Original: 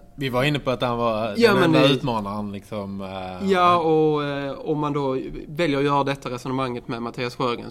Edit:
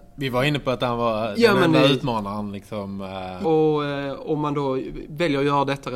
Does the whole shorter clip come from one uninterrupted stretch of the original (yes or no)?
no